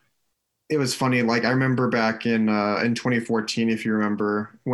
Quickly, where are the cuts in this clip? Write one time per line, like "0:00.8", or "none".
none